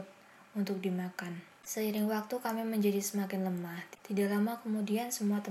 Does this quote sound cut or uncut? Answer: cut